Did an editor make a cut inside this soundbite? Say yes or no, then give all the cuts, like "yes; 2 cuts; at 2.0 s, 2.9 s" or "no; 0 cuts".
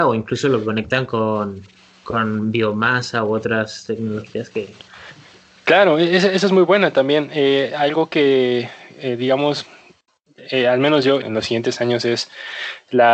yes; 1 cut; at 11.2 s